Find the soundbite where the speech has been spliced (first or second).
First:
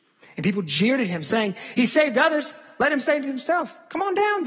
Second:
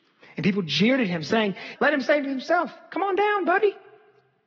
second